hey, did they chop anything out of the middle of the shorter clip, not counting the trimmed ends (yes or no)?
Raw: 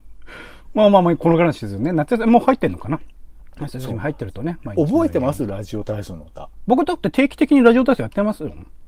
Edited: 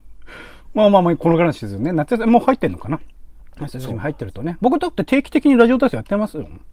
yes